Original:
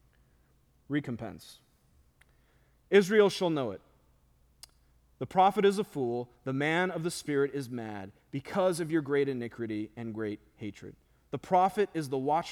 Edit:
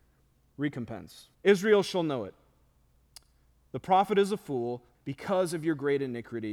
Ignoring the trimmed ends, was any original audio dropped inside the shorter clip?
yes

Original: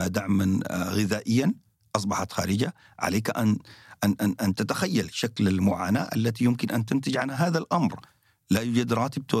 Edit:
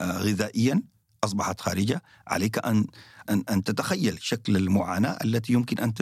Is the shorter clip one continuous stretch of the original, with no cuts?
no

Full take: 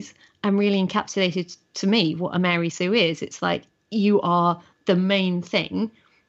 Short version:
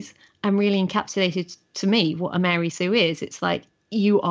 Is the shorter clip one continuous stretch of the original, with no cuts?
yes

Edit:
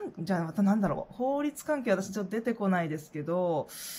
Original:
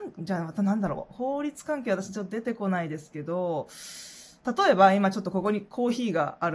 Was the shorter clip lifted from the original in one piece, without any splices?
yes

